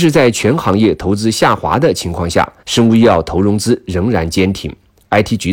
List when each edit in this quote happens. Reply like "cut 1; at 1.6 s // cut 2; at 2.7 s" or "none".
cut 1; at 2.6 s